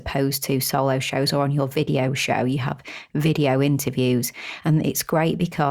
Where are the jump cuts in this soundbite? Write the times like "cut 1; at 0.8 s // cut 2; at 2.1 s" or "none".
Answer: none